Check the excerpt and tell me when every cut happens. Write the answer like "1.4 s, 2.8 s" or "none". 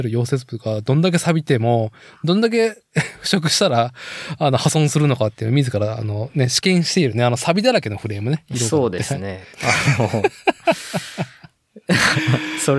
9.5 s